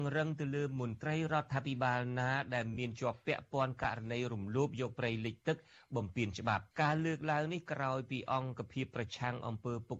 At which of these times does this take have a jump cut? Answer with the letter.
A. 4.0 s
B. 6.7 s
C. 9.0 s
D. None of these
B